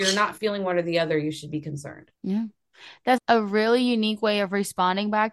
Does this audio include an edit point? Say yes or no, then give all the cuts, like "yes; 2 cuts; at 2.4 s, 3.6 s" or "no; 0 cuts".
yes; 2 cuts; at 2.1 s, 3.2 s